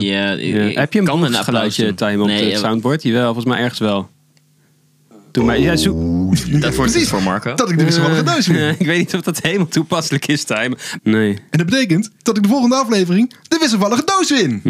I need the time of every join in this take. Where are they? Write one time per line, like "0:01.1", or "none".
0:11.0
0:12.2